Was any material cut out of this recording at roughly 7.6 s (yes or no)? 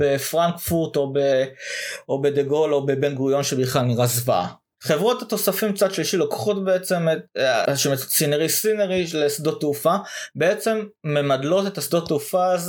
yes